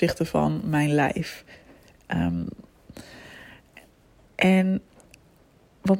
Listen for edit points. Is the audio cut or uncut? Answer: uncut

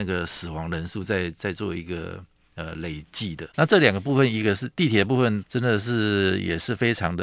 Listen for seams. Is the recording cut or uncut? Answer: cut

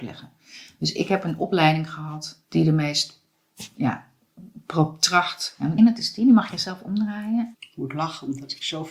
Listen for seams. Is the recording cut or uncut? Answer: cut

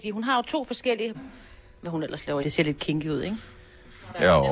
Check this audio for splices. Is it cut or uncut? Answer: cut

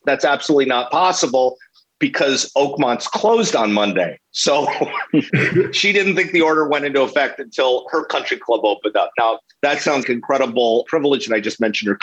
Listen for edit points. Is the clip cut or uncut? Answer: cut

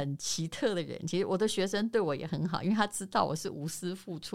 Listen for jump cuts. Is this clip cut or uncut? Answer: uncut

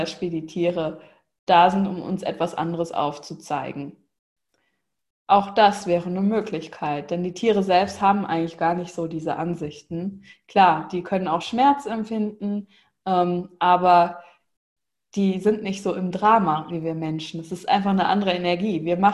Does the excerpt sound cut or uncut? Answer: uncut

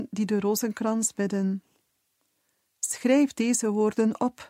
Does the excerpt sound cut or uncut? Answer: uncut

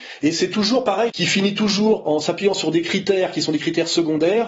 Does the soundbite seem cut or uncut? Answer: cut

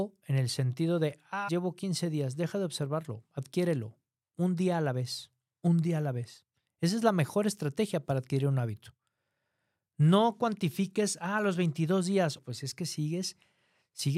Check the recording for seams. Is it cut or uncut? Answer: cut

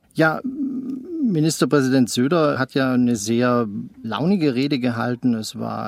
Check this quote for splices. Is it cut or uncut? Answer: uncut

